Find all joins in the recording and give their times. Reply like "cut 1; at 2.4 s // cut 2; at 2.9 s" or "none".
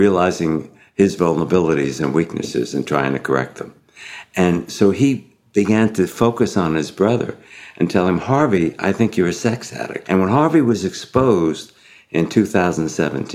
cut 1; at 10.0 s

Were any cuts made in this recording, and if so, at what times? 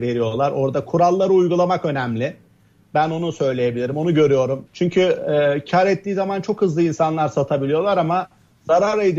cut 1; at 4.7 s

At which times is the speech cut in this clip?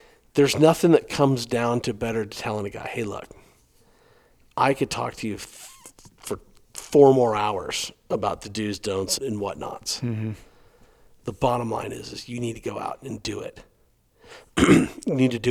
cut 1; at 9.2 s

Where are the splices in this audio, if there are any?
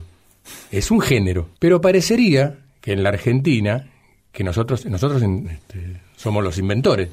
cut 1; at 1.5 s // cut 2; at 5.4 s

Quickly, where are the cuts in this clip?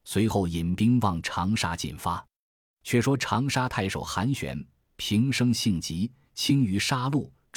none

